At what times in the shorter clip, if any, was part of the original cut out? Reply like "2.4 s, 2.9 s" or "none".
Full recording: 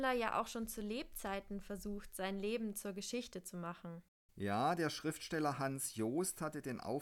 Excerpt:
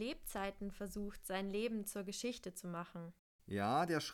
none